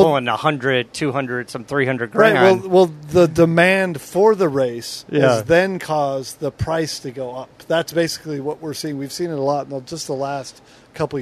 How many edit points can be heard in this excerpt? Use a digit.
0